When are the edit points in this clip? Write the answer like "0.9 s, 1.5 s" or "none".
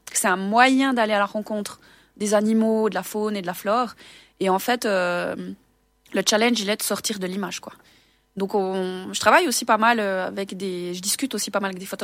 none

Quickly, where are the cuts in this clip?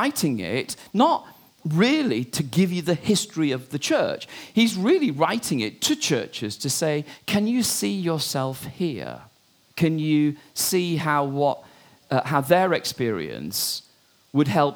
9.7 s

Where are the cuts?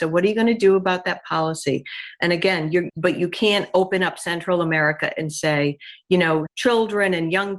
2.9 s, 6.5 s

